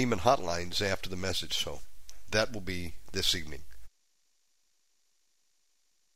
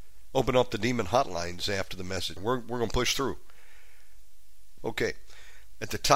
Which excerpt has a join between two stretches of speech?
second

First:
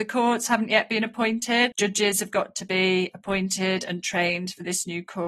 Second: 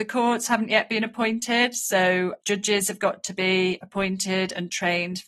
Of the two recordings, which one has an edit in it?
first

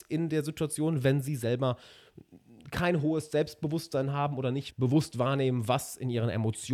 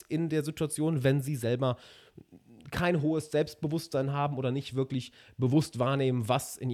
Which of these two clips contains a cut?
first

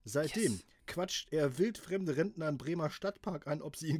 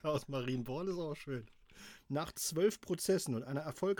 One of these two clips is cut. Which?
second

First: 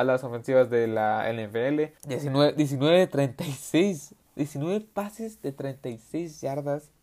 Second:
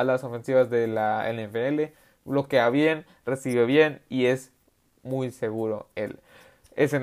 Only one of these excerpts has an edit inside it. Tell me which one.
first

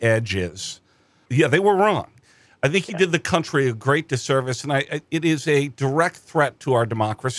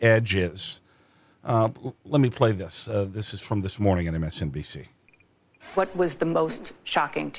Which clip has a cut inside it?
first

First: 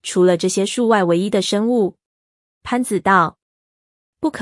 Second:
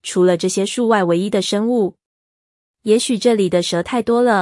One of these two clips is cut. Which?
first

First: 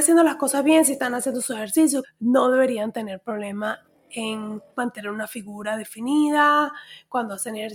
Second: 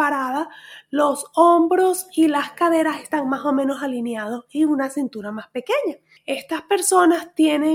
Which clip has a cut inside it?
first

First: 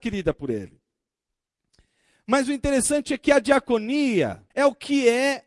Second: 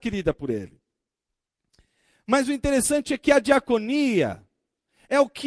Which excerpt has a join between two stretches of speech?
first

